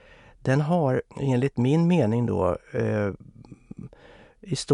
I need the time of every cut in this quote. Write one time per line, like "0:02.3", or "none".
0:01.1